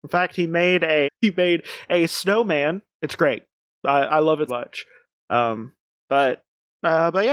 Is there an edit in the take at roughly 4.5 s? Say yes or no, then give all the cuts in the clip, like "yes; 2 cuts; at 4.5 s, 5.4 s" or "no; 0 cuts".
yes; 3 cuts; at 1.0 s, 2.9 s, 4.5 s